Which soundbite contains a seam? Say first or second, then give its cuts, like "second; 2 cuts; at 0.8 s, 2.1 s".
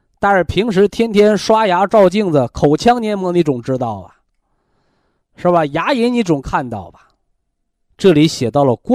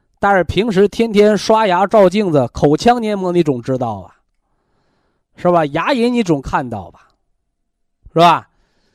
first; 1 cut; at 7.9 s